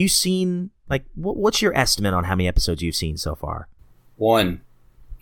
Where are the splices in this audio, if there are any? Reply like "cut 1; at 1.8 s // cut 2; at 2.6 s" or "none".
none